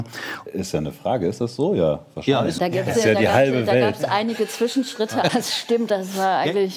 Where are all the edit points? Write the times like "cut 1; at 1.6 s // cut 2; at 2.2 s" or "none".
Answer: cut 1; at 2.6 s // cut 2; at 5.3 s